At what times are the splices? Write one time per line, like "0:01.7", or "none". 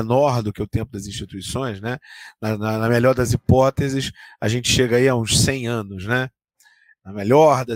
none